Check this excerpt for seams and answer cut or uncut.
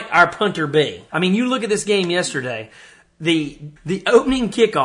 cut